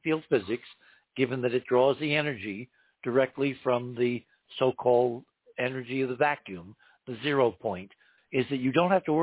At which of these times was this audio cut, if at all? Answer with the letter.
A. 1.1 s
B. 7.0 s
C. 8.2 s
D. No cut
C